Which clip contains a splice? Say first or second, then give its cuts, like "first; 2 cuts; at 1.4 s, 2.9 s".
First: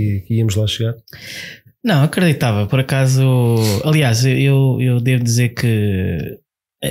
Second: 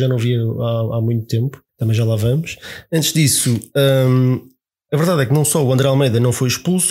second; 1 cut; at 1.7 s